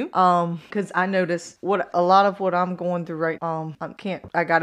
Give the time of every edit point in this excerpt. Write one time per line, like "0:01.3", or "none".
0:01.9
0:03.4